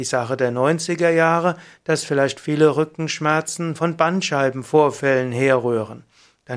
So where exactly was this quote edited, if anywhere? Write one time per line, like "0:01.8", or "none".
none